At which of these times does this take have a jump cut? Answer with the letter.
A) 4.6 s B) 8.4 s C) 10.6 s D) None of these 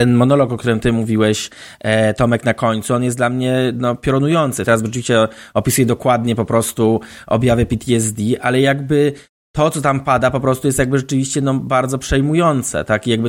A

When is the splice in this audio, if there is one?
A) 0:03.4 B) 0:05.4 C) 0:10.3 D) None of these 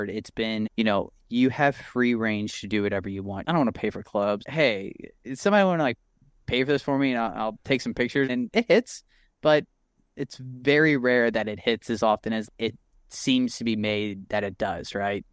A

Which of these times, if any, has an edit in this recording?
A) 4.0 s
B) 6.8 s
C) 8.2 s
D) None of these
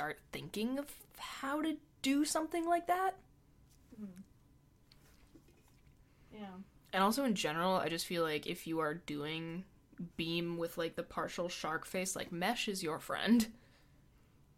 D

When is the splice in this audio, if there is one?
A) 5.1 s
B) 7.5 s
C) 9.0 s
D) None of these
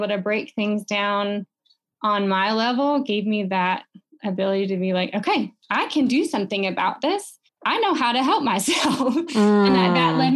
B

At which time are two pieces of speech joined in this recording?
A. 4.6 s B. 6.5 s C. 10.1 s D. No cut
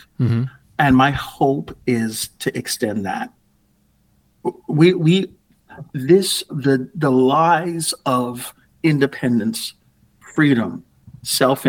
B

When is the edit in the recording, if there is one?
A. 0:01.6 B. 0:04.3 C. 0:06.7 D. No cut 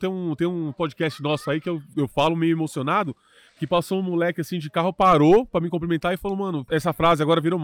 C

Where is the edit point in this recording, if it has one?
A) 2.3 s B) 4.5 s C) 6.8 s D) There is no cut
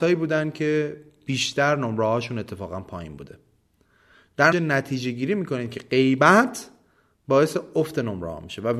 B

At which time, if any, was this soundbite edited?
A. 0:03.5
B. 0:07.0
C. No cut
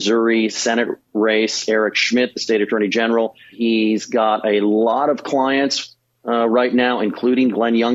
A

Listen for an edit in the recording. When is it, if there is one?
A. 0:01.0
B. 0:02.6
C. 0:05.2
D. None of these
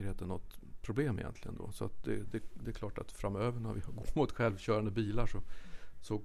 D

